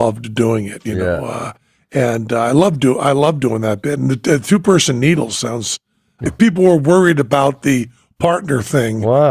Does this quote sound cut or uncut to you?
cut